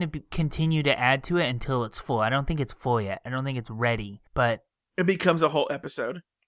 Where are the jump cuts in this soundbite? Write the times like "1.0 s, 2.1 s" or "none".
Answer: 4.3 s